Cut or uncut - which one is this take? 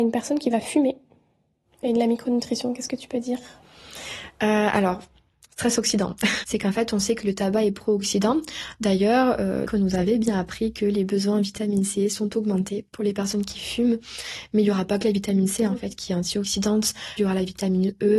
cut